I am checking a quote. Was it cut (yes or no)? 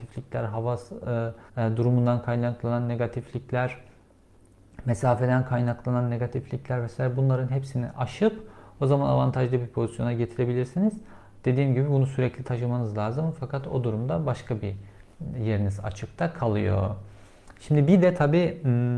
yes